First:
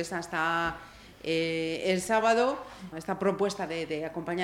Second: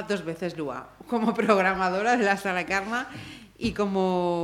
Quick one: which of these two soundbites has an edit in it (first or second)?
first